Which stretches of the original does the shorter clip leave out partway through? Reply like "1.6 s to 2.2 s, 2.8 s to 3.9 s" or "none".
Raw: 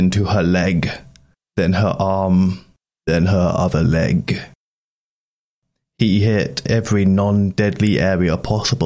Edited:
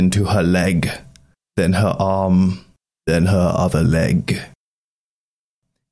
none